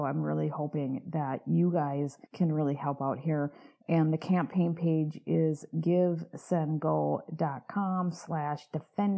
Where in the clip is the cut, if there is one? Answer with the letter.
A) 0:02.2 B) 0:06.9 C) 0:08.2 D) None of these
A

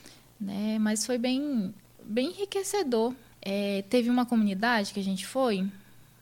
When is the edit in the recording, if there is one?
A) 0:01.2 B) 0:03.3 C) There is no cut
B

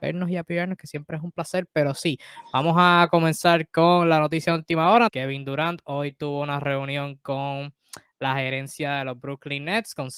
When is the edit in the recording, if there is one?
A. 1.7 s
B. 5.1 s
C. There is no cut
B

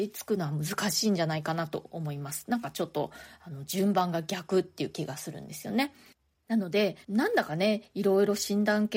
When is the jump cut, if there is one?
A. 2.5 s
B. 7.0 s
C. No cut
B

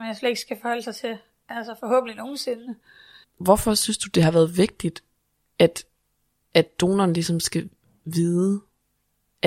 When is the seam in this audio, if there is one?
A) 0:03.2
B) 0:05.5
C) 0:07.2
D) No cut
A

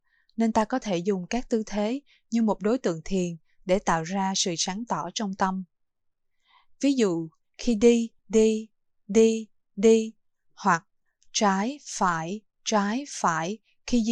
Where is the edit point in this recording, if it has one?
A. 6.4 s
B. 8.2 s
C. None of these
B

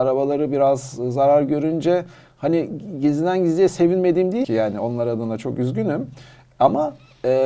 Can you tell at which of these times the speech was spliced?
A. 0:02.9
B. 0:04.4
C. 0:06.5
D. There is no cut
B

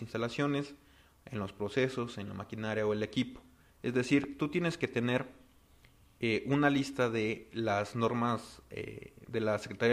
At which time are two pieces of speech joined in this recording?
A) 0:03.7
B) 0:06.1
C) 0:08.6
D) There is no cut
A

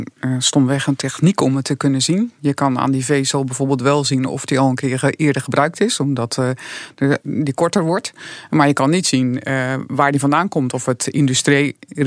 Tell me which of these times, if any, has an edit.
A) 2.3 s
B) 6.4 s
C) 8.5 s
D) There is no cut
D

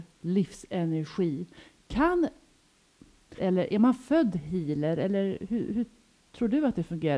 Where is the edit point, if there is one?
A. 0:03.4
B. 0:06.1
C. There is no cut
A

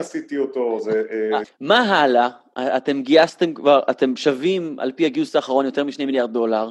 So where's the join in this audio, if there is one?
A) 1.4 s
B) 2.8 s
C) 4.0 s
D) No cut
A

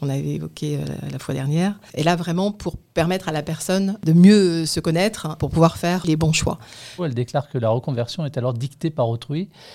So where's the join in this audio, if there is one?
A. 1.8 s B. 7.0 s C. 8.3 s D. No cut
B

